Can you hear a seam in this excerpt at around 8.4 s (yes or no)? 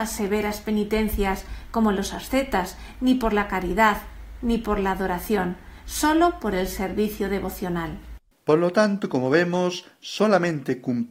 no